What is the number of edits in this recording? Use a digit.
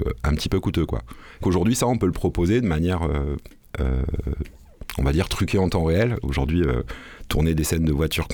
2